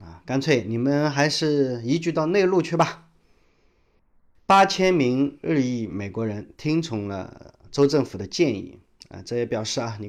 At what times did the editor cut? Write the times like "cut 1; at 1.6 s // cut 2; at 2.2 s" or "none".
none